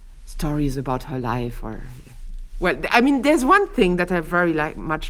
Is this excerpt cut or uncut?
uncut